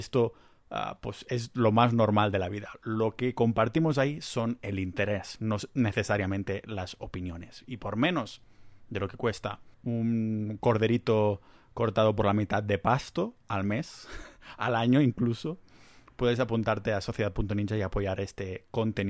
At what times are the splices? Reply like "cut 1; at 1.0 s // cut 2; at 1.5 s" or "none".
cut 1; at 9.7 s